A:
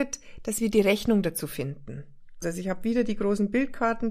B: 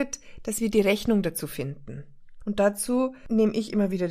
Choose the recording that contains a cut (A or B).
A